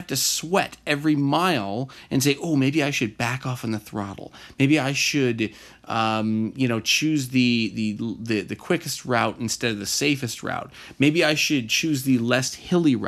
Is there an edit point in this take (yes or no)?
no